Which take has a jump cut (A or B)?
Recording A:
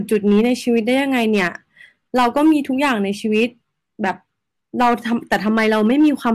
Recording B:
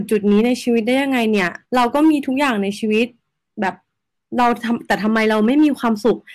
B